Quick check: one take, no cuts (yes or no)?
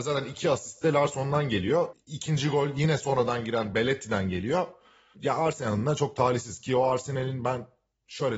yes